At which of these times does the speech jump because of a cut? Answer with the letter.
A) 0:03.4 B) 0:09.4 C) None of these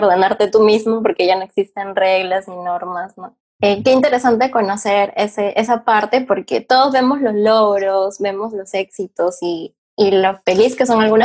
A